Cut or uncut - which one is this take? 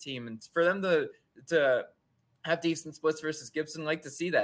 uncut